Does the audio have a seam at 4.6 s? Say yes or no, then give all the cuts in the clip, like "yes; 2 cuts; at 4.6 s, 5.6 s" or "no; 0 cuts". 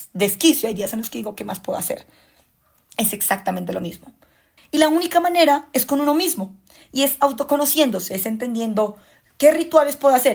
yes; 1 cut; at 4.6 s